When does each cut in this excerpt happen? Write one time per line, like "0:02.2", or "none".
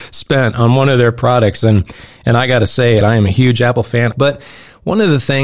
0:03.0
0:04.1